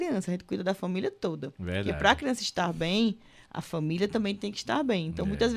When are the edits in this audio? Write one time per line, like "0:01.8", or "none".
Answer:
none